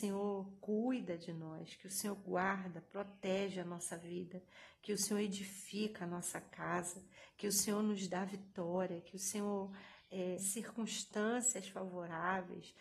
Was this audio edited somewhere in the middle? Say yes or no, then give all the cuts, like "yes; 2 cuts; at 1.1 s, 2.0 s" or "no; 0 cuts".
yes; 1 cut; at 10.4 s